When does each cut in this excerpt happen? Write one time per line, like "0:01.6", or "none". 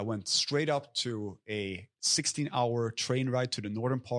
none